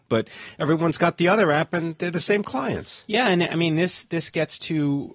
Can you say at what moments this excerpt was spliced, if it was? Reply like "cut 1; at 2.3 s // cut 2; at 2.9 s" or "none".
none